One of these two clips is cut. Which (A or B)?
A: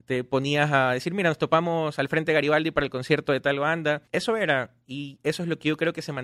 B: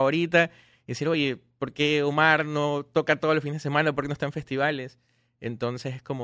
A